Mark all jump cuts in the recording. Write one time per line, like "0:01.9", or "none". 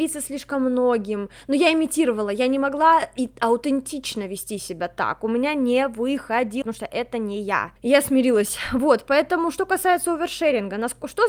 0:06.6